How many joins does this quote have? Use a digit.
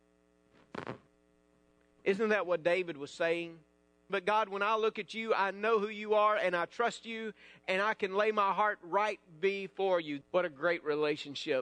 2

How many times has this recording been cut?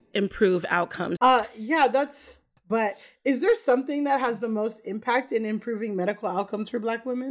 2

